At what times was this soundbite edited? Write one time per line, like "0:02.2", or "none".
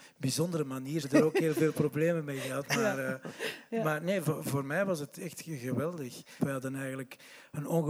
0:01.0
0:06.4